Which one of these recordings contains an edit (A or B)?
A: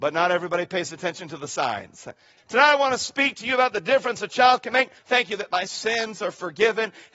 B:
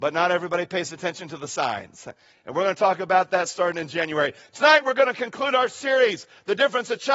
A